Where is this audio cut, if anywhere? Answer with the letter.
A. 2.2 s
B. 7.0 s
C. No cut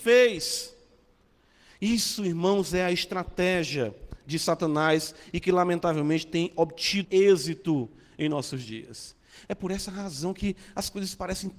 B